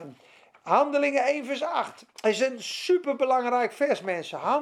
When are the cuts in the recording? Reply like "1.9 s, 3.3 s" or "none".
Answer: 2.1 s